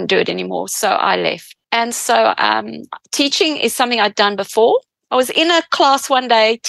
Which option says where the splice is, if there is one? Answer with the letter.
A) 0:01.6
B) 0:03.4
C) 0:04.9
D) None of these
A